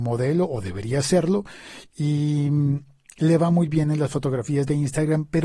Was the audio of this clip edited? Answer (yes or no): no